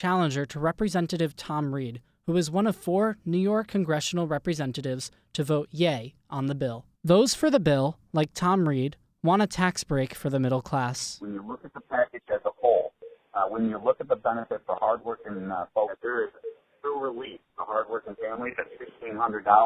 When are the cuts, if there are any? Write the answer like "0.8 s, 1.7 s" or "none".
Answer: 6.9 s